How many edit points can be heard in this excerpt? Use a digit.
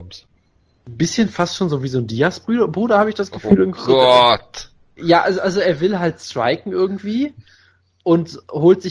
0